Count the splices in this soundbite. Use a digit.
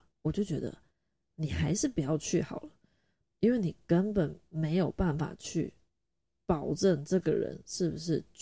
0